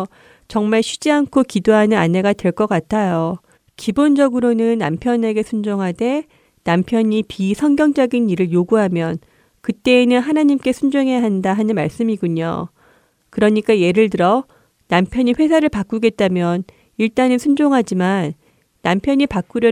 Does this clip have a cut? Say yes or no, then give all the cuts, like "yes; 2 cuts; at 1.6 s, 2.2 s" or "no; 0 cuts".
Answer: yes; 1 cut; at 3.6 s